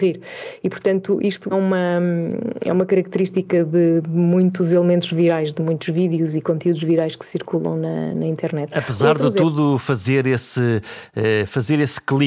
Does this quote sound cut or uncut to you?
cut